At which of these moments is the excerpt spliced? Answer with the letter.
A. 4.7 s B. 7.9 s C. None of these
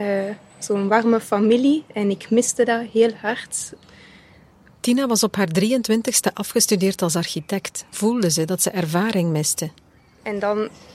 B